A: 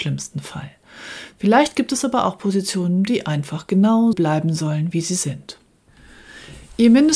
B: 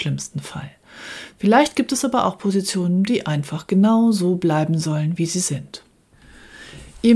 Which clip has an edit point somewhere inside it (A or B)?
A